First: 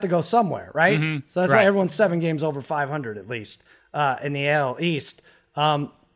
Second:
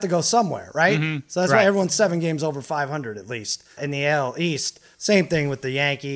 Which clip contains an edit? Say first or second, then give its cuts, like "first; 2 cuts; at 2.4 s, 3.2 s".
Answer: second; 2 cuts; at 3.8 s, 4.9 s